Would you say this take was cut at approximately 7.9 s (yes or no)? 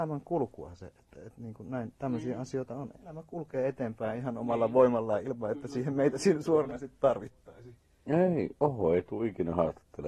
no